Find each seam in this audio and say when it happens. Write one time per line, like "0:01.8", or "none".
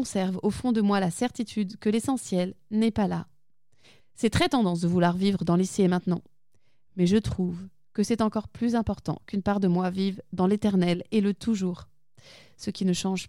0:04.0